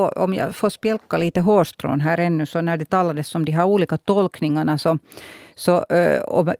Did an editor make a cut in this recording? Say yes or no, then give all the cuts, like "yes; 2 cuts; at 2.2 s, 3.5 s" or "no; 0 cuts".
no; 0 cuts